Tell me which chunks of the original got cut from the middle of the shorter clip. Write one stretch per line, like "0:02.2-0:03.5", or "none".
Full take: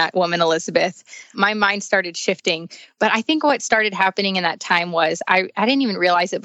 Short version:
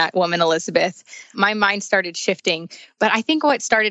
none